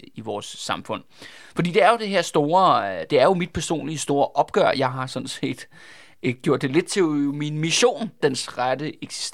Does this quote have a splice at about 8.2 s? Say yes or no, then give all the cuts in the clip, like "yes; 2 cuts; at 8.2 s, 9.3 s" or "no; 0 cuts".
yes; 1 cut; at 8.2 s